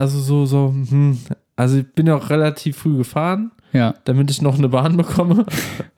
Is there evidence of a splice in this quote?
no; 0 cuts

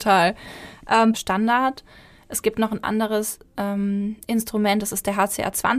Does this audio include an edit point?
yes; 1 cut; at 1.1 s

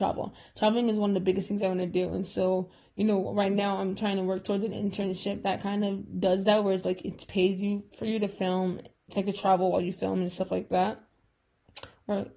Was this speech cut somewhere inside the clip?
no; 0 cuts

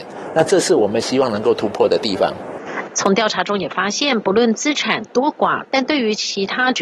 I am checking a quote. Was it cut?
yes; 2 cuts; at 2.9 s, 5.7 s

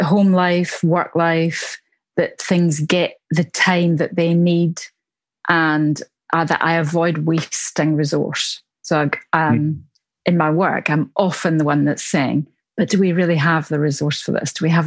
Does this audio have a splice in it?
no; 0 cuts

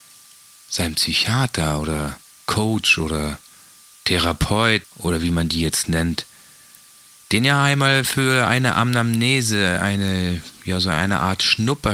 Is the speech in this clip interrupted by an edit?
yes; 1 cut; at 4.8 s

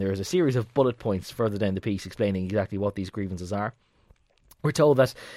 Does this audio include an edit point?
no; 0 cuts

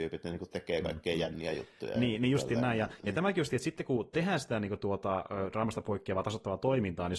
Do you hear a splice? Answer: no; 0 cuts

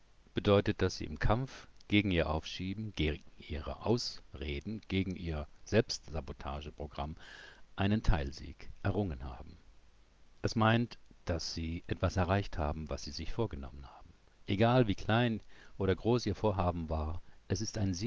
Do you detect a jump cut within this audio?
yes; 1 cut; at 10.4 s

